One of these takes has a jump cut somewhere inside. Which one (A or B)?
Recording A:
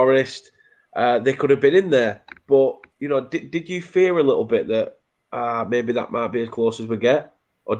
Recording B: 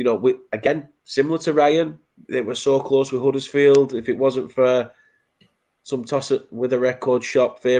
A